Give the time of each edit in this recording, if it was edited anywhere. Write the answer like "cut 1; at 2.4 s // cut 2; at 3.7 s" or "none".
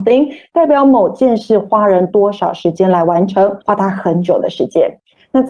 cut 1; at 3.6 s